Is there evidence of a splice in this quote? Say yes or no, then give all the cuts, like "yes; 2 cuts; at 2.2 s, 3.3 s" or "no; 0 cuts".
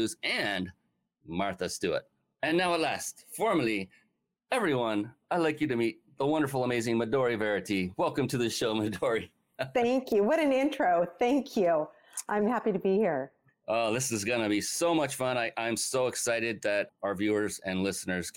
no; 0 cuts